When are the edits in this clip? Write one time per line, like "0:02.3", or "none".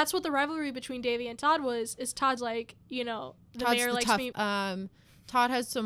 0:02.4
0:04.3